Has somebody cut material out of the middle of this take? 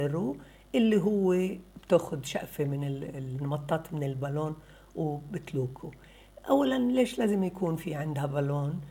no; 0 cuts

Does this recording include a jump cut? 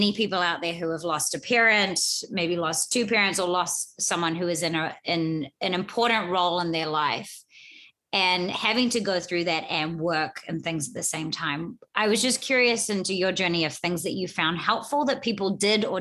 no; 0 cuts

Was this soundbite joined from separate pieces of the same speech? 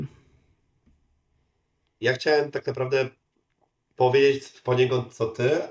no; 0 cuts

